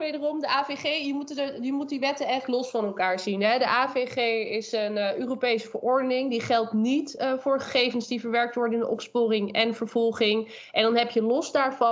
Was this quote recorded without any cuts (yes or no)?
yes